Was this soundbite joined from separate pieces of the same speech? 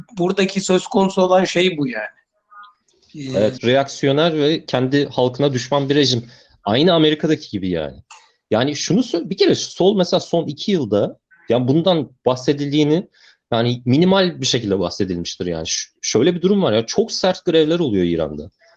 yes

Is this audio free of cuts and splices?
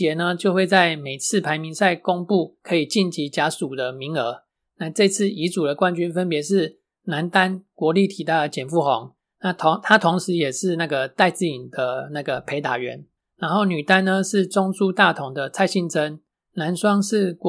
yes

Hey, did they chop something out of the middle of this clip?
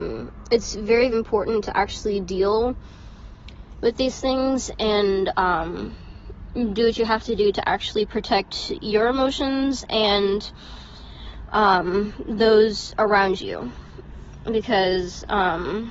yes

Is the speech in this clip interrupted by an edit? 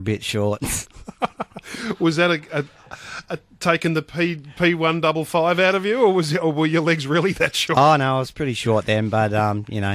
no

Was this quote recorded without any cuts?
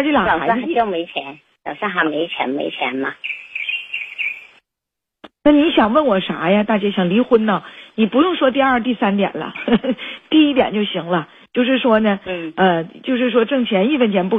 yes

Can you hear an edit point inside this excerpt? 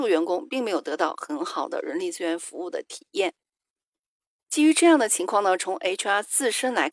no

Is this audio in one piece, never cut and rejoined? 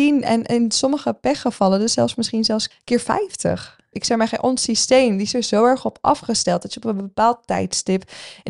no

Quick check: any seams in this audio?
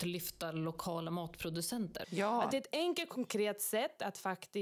yes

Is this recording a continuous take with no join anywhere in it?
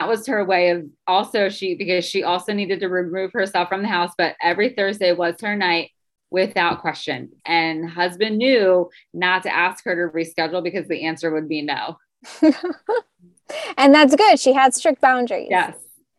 no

